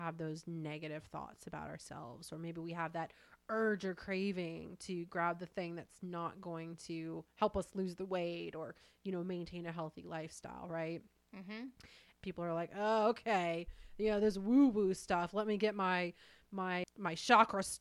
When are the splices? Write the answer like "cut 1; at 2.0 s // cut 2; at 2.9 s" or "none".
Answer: cut 1; at 12.1 s // cut 2; at 16.8 s